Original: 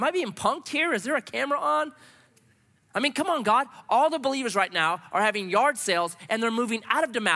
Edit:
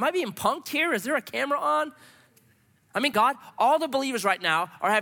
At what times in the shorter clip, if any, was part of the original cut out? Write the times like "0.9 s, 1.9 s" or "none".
3.1 s